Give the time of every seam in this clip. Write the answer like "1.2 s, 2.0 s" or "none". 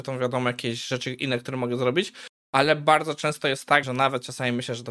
3.8 s